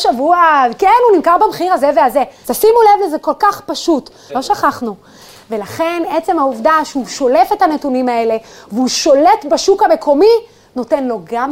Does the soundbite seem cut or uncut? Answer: cut